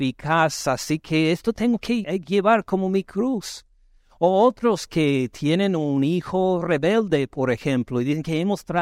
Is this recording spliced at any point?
yes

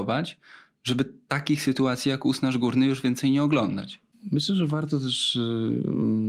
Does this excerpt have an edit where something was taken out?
no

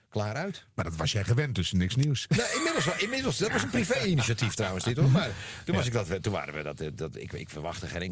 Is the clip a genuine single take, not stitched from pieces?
yes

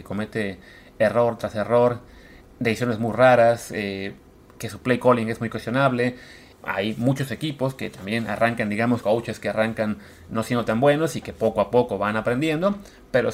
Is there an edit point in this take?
yes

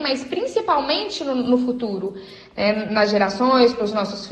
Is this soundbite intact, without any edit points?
yes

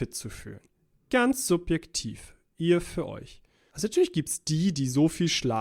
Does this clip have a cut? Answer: yes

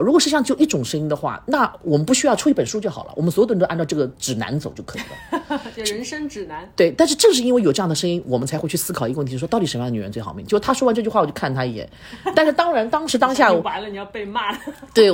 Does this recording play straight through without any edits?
yes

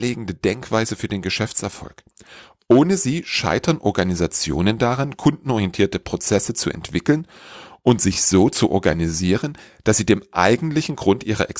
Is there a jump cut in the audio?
no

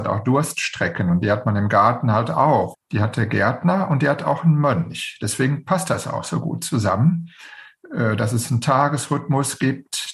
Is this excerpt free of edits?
no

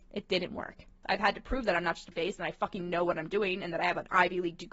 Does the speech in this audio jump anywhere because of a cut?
yes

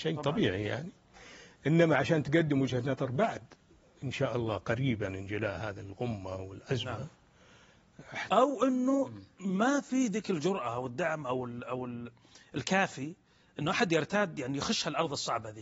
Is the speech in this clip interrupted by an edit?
yes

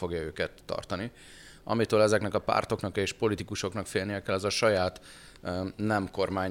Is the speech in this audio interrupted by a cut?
yes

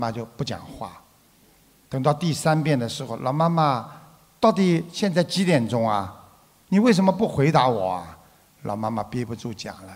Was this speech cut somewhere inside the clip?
no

